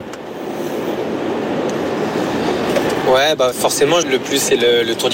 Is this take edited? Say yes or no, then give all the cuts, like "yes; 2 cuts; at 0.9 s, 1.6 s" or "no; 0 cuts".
yes; 1 cut; at 4.0 s